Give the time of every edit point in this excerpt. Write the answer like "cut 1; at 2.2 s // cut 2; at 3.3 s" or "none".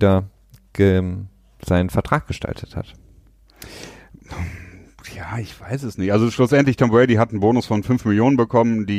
none